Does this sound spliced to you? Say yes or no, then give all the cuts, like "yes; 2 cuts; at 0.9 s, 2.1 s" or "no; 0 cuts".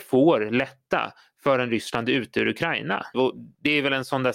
yes; 1 cut; at 3.1 s